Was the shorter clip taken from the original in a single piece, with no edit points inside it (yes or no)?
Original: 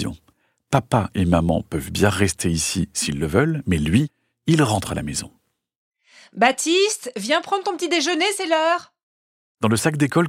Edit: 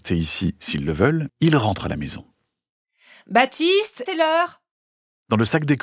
no